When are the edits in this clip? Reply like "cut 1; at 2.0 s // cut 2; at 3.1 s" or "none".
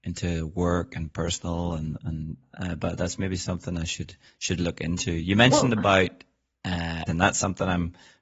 cut 1; at 7.1 s